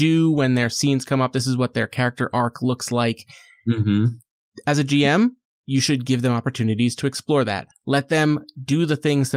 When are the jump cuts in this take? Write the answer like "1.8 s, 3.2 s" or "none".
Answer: 7.7 s